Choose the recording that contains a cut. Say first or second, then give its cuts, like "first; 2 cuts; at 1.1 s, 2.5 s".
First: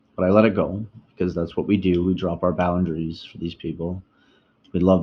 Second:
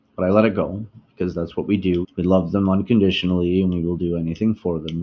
second; 1 cut; at 2.0 s